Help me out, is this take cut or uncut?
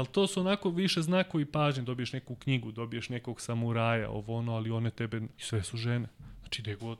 cut